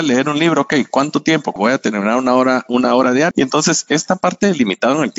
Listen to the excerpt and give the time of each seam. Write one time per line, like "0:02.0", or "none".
0:01.6
0:03.3